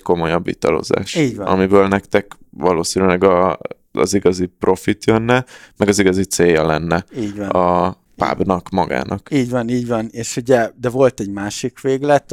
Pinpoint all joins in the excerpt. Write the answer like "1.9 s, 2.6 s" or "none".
none